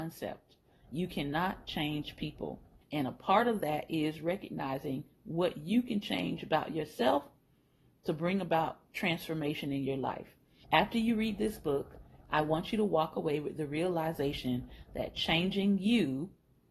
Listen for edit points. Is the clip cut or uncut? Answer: cut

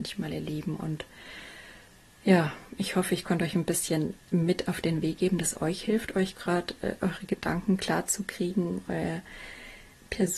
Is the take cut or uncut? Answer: uncut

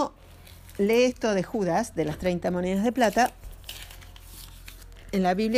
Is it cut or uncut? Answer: uncut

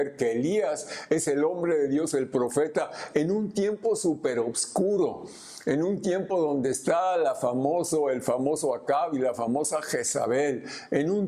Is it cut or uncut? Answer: uncut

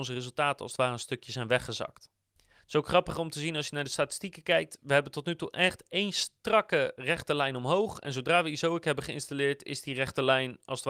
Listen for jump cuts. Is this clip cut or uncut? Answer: uncut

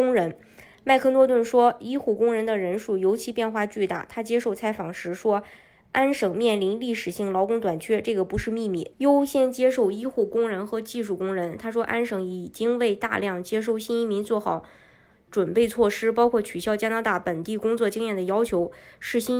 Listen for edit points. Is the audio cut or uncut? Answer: cut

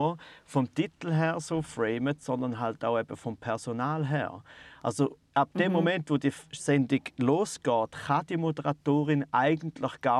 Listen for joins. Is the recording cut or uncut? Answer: uncut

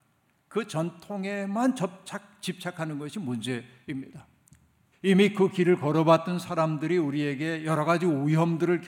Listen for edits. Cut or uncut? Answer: cut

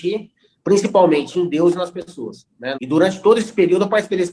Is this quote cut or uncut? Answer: cut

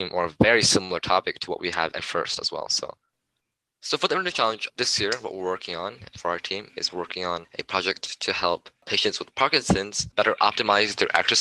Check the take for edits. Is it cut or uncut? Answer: uncut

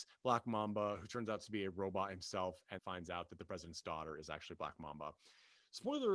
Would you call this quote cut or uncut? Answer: cut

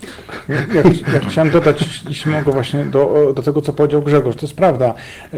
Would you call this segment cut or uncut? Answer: uncut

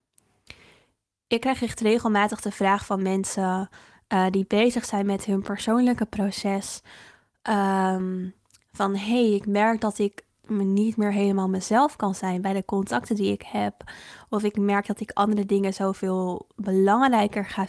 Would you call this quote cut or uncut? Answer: uncut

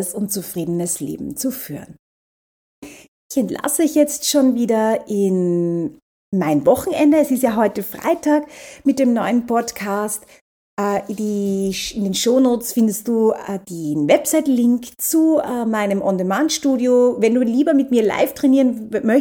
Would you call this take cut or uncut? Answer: uncut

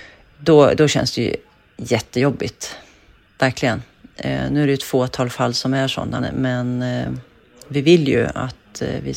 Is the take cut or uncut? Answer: cut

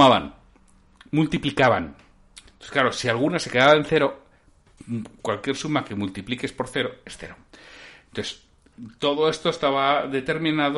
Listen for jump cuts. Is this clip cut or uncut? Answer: uncut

